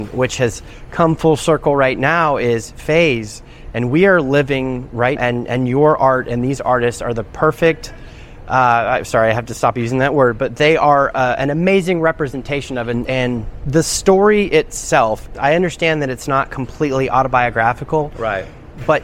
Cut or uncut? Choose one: cut